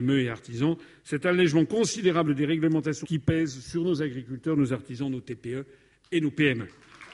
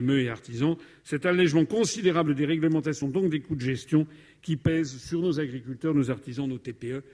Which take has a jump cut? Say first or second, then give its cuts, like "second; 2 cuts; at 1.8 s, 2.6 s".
first; 1 cut; at 3.0 s